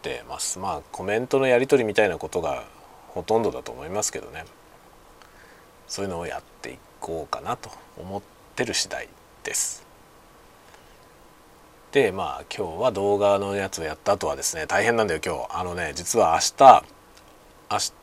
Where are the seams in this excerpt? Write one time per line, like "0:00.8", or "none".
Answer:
none